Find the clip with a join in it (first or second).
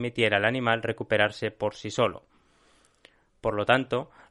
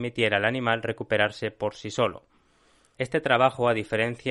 second